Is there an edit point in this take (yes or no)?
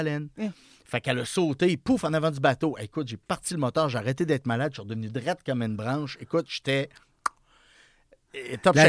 no